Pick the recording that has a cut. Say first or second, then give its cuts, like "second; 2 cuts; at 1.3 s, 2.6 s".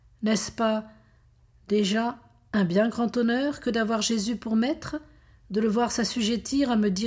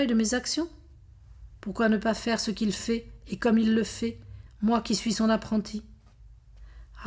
second; 1 cut; at 4.5 s